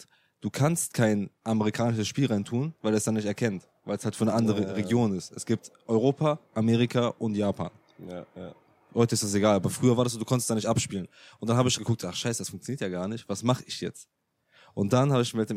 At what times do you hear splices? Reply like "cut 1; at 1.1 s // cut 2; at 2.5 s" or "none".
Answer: cut 1; at 11.8 s